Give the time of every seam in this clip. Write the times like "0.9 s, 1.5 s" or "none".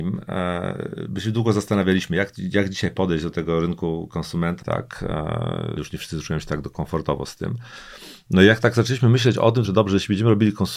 4.6 s, 5.8 s, 9.6 s